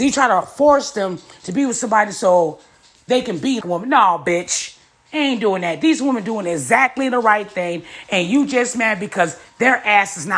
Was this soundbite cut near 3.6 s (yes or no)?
yes